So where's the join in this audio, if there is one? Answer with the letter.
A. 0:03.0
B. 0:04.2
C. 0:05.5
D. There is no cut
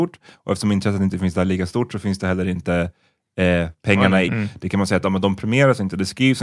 B